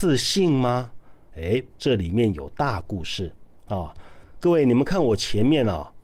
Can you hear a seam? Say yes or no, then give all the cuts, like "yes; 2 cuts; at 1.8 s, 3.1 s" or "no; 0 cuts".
yes; 1 cut; at 1.8 s